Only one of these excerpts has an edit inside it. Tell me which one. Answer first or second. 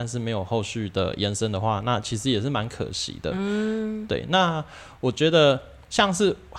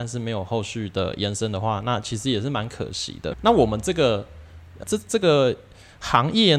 second